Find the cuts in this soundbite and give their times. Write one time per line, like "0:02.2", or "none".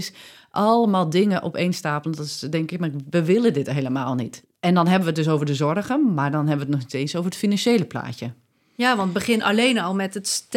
0:04.4